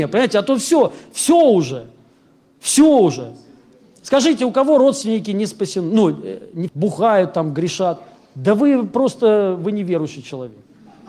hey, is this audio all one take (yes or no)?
no